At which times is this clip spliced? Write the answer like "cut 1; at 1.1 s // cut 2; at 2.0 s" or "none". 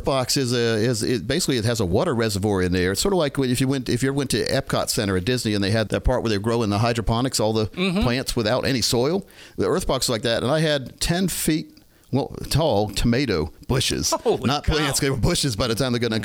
cut 1; at 5.9 s